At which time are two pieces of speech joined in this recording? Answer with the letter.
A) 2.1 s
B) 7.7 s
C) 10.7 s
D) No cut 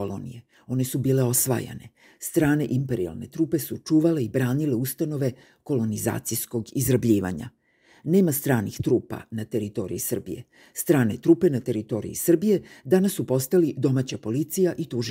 D